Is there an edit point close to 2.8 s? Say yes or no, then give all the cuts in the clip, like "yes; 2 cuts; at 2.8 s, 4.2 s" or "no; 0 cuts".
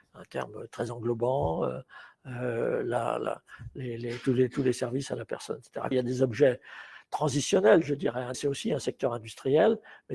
no; 2 cuts; at 5.9 s, 8.3 s